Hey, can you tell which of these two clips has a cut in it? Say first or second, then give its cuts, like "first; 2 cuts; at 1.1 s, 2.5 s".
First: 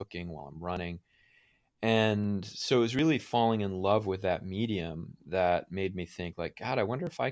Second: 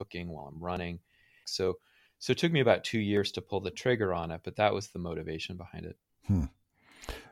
second; 1 cut; at 1.4 s